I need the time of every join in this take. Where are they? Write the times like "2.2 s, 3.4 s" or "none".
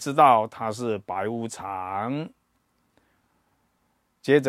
none

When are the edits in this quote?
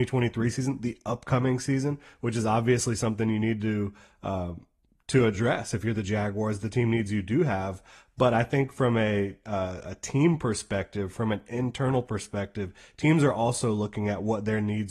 none

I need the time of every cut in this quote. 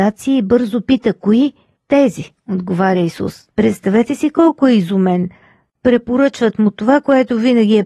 3.5 s

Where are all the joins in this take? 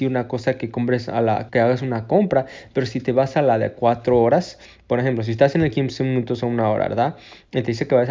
1.5 s

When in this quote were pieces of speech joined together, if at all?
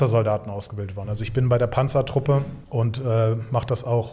2.6 s

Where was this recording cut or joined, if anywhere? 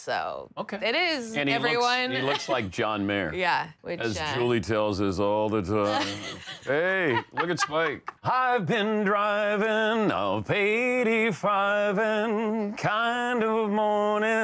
3.8 s, 8.2 s

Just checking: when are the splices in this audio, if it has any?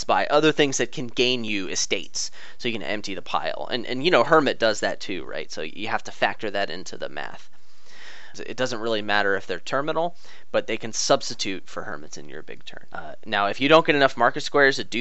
8.3 s, 12.9 s

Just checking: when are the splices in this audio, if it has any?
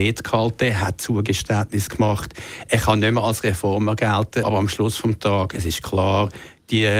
4.4 s

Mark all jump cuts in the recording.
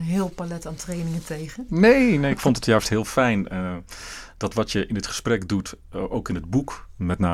1.7 s

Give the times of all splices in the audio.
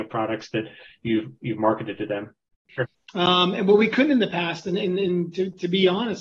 2.7 s

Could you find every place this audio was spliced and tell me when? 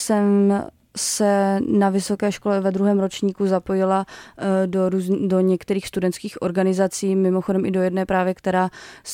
none

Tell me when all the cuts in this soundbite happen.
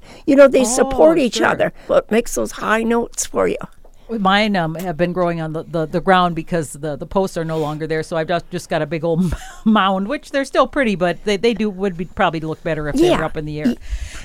1.9 s

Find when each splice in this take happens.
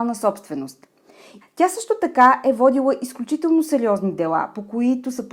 1.4 s

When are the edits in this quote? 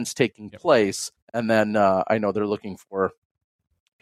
1.2 s

